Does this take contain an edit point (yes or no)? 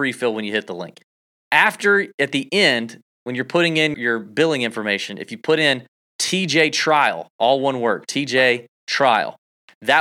yes